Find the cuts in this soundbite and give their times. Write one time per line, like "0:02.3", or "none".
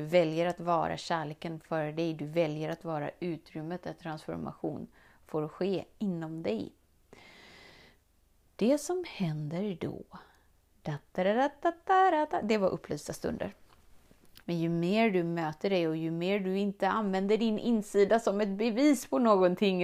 0:14.4